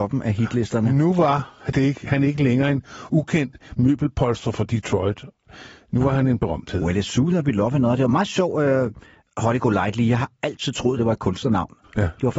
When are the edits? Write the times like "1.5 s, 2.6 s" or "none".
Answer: none